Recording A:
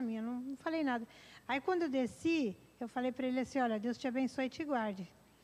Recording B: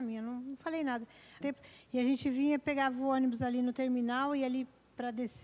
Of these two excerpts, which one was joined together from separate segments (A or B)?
B